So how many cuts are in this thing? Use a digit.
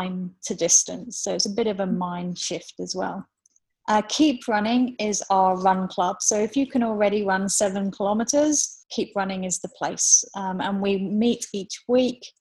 0